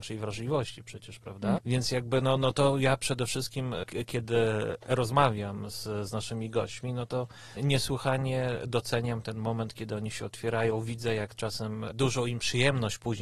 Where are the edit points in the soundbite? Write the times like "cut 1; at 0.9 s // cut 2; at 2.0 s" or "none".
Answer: cut 1; at 1.6 s